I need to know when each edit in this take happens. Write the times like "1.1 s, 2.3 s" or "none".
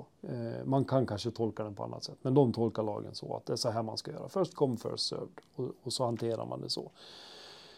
none